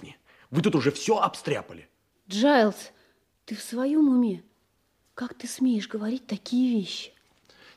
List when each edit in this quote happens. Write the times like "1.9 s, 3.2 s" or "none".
none